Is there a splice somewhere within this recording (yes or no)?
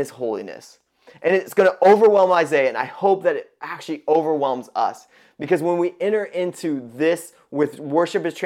no